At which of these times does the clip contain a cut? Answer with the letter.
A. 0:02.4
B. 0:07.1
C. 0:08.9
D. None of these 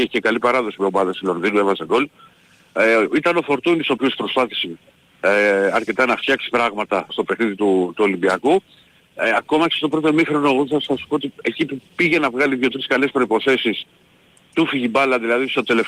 B